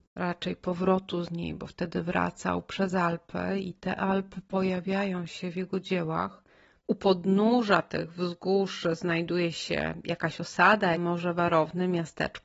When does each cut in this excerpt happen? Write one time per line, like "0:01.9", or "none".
0:06.8
0:10.9